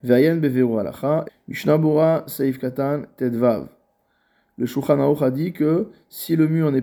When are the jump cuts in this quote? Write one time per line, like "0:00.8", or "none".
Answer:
0:01.3